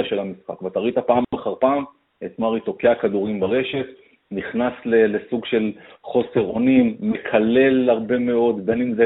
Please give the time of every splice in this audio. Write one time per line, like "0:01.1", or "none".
none